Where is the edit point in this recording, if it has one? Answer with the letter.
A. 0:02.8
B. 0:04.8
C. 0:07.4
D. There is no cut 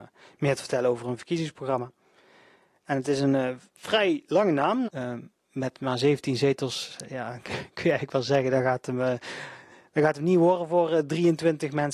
B